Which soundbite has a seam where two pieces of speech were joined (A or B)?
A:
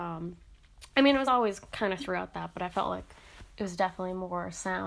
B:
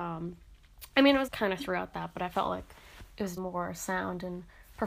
B